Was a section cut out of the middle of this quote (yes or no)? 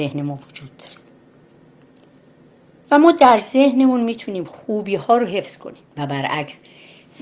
yes